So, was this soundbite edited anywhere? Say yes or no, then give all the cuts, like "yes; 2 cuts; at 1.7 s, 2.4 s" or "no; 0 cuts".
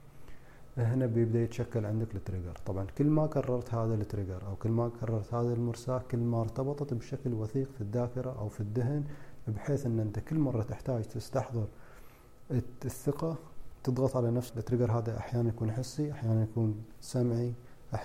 yes; 1 cut; at 14.5 s